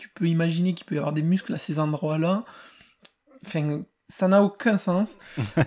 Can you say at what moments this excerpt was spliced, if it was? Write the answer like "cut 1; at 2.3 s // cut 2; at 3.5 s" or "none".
none

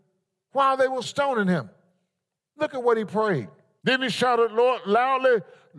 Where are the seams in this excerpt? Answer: cut 1; at 1.0 s // cut 2; at 3.8 s

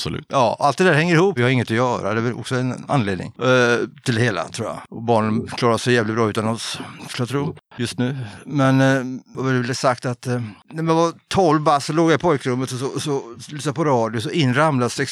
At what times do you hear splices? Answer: cut 1; at 1.4 s

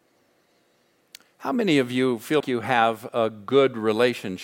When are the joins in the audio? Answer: cut 1; at 2.4 s

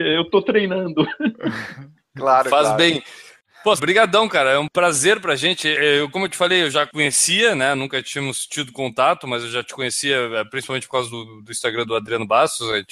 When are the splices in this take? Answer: cut 1; at 3.8 s

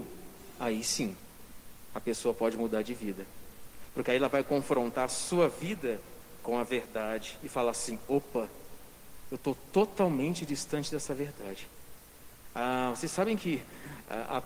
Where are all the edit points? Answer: cut 1; at 12.4 s

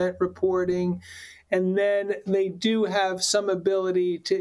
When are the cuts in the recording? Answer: none

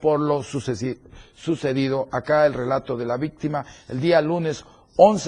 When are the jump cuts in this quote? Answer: none

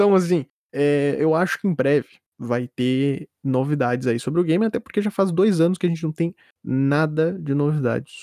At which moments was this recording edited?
none

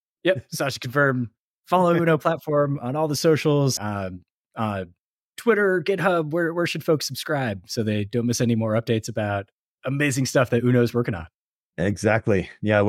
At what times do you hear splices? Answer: cut 1; at 3.8 s

